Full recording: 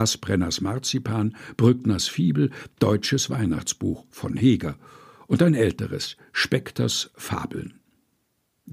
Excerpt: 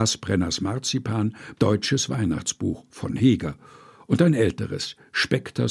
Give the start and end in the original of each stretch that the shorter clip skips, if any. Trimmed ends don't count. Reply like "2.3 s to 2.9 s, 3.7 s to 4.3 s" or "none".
1.5 s to 2.7 s